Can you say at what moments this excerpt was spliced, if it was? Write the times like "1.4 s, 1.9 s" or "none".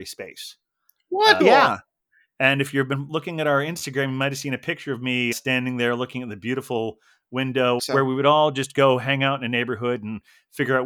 1.4 s, 5.3 s, 7.8 s